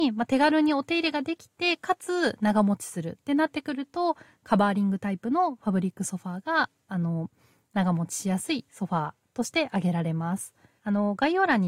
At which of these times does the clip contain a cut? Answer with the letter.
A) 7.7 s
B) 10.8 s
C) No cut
B